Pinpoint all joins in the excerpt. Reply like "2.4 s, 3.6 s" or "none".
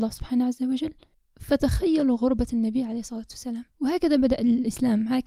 3.7 s